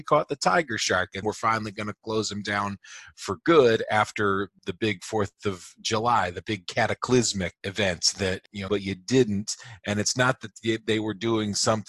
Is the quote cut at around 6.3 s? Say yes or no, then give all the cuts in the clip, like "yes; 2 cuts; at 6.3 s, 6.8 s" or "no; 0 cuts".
no; 2 cuts; at 1.2 s, 8.7 s